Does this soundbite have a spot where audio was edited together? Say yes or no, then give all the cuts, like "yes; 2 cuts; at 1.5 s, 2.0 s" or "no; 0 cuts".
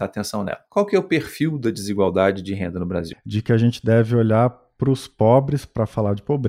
yes; 1 cut; at 3.1 s